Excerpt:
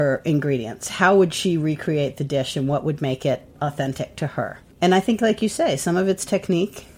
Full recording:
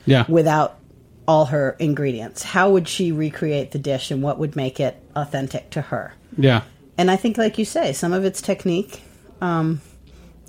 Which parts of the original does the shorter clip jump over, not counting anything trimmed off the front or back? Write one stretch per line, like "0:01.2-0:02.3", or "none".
0:06.3-0:06.9